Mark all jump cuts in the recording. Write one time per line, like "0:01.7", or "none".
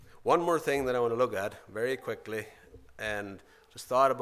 none